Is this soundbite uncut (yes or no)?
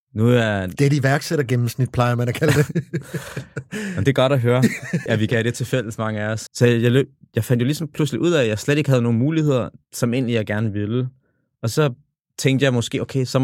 no